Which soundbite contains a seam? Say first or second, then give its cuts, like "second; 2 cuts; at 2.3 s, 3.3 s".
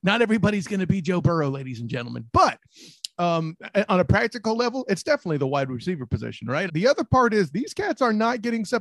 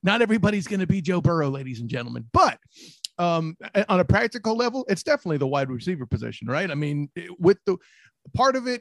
first; 1 cut; at 6.7 s